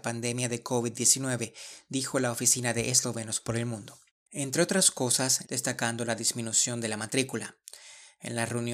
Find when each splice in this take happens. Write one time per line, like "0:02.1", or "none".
0:04.3
0:05.4